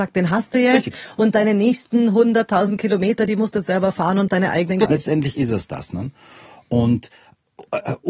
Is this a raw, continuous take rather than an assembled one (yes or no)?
no